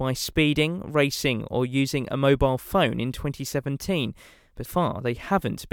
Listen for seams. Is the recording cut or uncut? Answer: cut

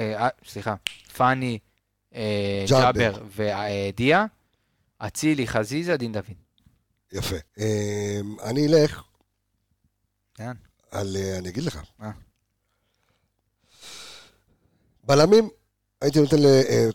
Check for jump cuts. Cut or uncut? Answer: cut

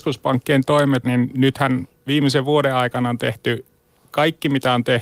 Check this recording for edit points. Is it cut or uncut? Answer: cut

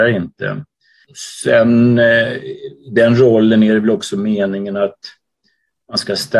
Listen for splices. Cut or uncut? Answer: uncut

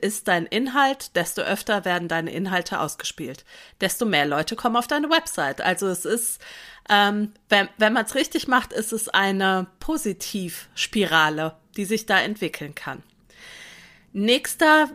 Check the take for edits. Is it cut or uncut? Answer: uncut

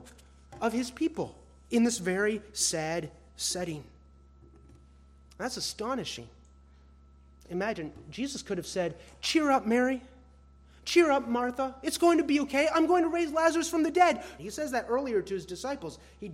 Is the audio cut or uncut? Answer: cut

